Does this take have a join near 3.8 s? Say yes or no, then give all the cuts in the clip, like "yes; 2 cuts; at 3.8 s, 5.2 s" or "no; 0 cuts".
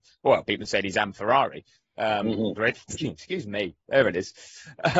no; 1 cut; at 2.5 s